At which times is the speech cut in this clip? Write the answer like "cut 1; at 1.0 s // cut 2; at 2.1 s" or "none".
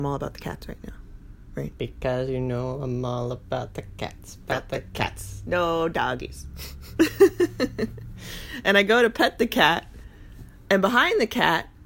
none

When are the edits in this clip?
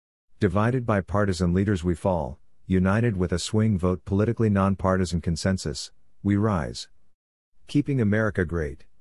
none

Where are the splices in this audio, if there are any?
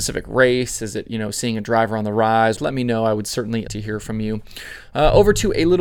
cut 1; at 2.6 s // cut 2; at 3.7 s

